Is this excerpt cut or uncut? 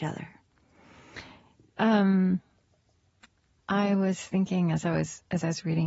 cut